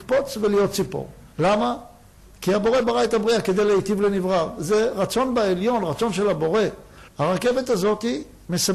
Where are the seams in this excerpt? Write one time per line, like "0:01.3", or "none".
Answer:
0:01.3
0:07.1